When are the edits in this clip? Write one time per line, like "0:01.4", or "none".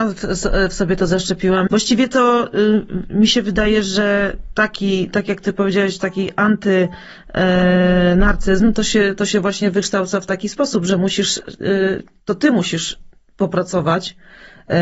0:01.7